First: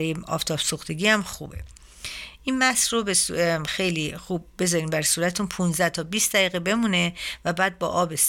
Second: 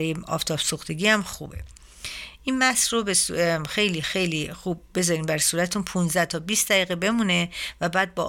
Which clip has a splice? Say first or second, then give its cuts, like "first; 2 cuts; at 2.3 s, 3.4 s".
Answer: first; 1 cut; at 3.7 s